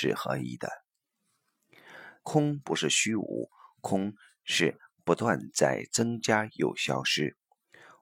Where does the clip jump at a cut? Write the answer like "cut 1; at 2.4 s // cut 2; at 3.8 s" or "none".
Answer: cut 1; at 2.2 s